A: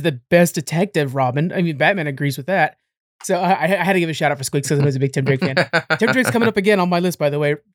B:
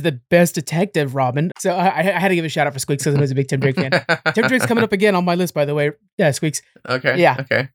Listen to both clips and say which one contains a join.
B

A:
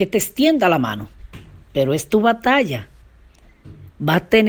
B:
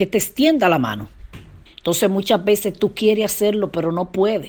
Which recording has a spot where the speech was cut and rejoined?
B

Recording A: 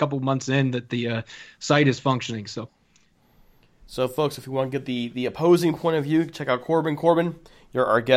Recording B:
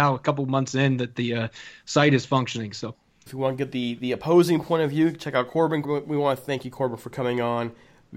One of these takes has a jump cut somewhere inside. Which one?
B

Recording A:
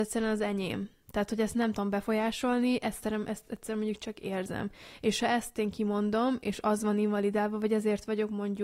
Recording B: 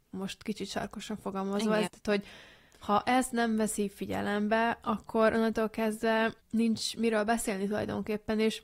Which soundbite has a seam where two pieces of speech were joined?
B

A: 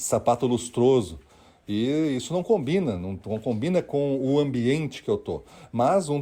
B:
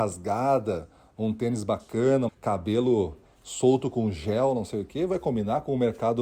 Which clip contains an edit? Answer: B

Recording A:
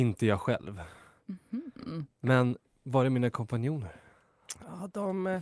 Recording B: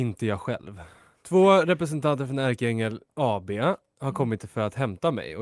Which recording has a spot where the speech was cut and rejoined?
B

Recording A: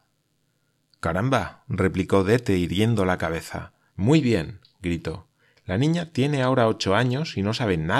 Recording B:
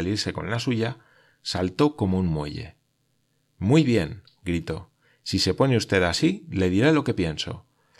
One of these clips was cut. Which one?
A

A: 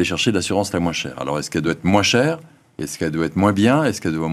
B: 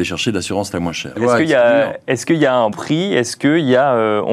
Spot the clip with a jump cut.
B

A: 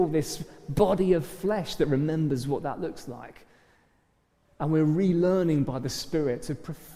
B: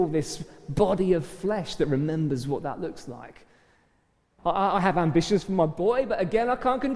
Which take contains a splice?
B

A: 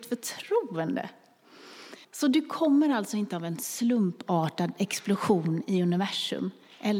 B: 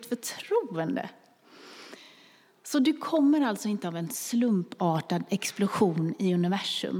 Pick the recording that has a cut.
A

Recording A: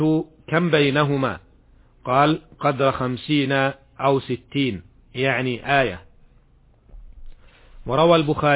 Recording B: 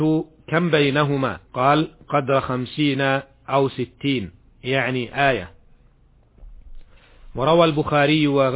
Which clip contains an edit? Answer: B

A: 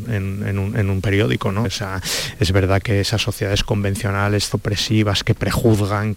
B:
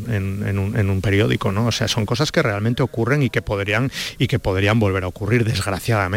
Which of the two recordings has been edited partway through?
A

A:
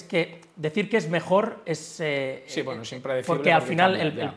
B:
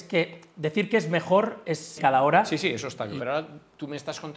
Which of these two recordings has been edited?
B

